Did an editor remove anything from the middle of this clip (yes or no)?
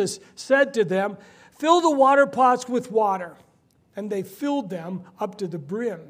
no